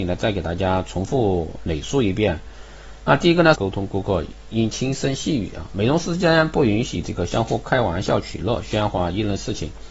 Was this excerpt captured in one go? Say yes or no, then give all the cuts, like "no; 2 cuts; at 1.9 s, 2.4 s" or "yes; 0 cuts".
no; 1 cut; at 3.5 s